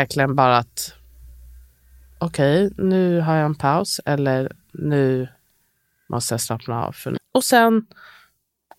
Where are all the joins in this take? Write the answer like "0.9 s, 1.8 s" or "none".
7.2 s